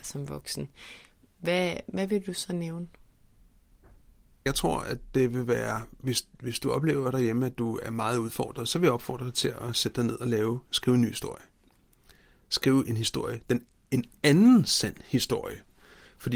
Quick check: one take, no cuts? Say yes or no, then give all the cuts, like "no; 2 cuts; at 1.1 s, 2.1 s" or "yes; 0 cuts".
yes; 0 cuts